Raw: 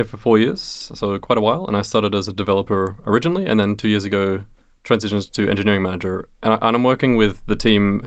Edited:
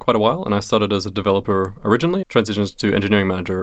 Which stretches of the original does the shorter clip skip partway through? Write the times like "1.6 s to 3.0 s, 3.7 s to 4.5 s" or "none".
3.4 s to 4.8 s